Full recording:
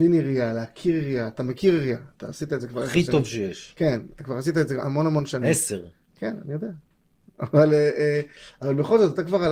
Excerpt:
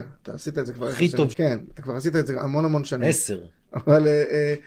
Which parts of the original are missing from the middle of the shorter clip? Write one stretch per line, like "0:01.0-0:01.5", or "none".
0:03.3-0:03.7
0:06.1-0:07.3